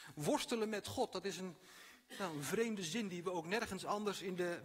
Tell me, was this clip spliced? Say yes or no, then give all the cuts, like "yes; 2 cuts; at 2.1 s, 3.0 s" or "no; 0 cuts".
no; 0 cuts